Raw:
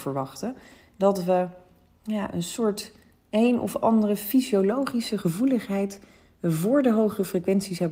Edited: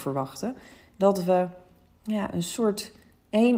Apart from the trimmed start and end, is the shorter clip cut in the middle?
no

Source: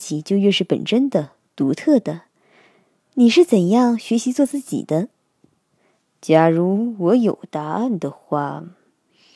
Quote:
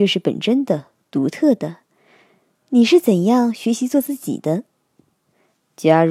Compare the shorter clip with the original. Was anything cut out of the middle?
no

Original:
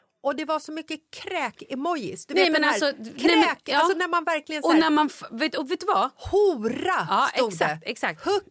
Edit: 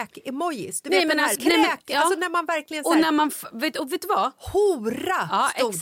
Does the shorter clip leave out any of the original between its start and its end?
yes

